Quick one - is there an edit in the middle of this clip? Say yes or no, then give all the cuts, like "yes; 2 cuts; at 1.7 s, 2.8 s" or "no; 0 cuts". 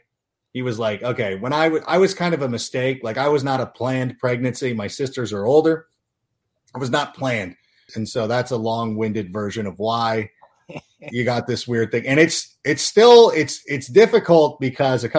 yes; 1 cut; at 7.9 s